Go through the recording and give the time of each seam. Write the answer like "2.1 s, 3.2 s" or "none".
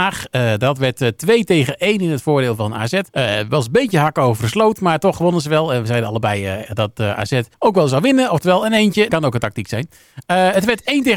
3.1 s, 7.5 s, 9.1 s